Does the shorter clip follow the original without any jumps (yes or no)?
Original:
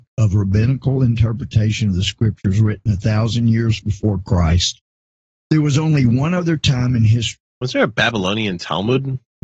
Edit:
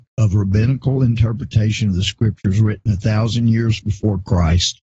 yes